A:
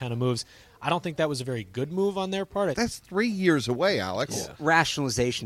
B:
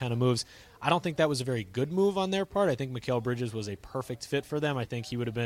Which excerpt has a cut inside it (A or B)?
A